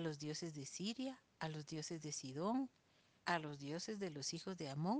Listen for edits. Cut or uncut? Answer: cut